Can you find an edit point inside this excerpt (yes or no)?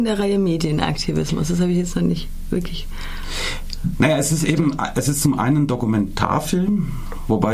no